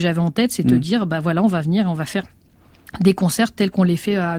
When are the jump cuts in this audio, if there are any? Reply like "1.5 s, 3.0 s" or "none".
none

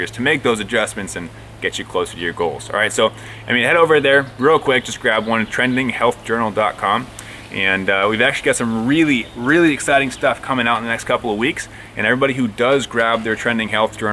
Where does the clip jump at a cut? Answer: none

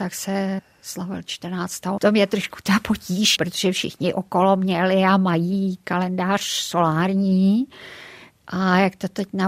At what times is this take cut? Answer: 2.0 s

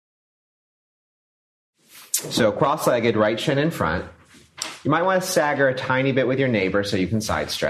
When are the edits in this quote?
none

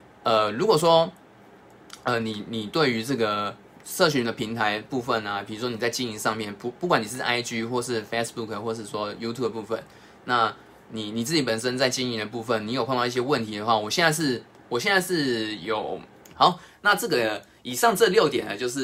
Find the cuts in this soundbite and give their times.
16.3 s

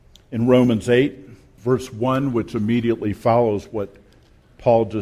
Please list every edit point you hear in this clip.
1.6 s

